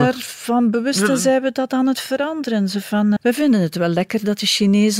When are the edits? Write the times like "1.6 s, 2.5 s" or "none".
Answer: 3.2 s